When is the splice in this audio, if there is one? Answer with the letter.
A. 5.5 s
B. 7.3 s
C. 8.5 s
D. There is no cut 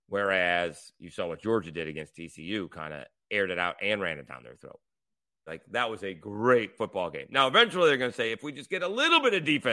A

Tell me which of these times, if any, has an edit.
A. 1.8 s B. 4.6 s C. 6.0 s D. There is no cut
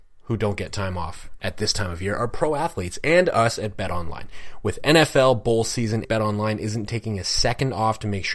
C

